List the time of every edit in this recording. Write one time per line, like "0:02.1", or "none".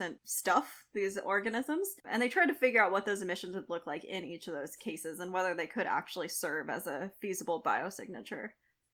none